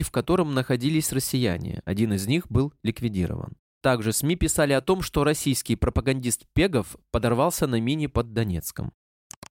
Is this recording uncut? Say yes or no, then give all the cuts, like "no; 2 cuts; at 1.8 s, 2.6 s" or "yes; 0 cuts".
yes; 0 cuts